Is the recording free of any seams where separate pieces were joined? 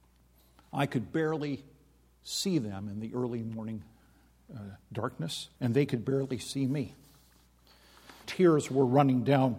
no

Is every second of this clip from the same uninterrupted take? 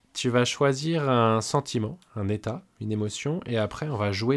yes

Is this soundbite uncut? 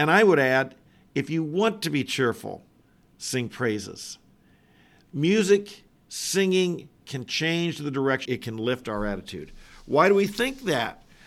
no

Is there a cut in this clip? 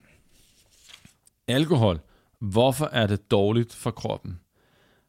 yes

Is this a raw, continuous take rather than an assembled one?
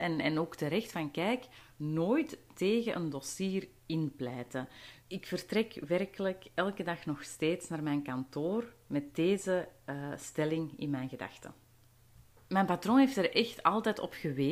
no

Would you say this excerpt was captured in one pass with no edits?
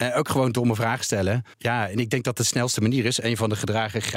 no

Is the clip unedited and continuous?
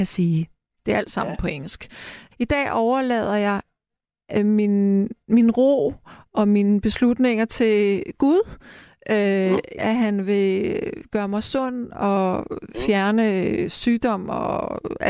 no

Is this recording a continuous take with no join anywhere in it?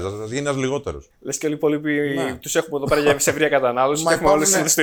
no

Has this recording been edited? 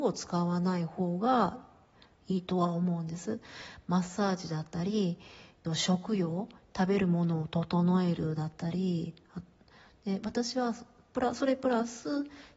yes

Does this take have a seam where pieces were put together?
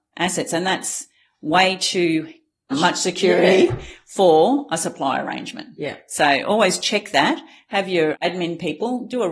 yes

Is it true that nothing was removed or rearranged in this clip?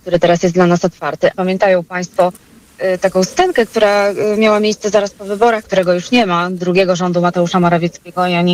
no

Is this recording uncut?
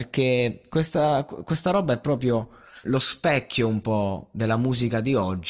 no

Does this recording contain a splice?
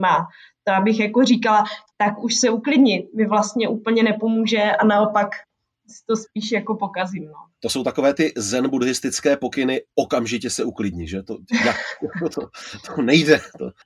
no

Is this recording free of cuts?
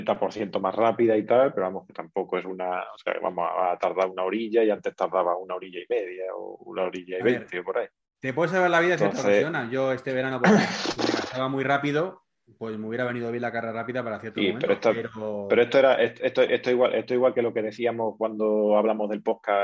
yes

